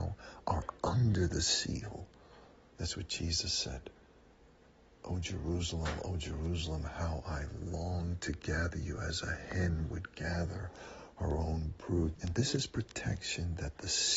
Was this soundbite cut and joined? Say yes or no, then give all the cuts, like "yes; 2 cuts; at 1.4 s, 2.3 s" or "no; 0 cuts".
yes; 2 cuts; at 2.7 s, 12.2 s